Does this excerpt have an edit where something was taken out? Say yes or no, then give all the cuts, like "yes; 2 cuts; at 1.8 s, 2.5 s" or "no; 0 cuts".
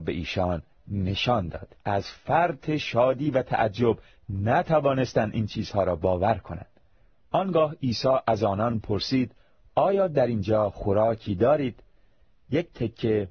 yes; 1 cut; at 1.8 s